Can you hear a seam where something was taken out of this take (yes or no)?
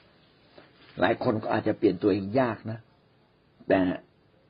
no